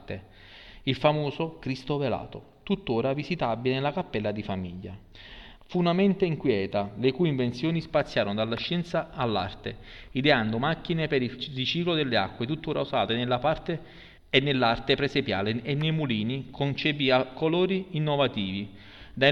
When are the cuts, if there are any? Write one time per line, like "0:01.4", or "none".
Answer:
0:05.6
0:14.2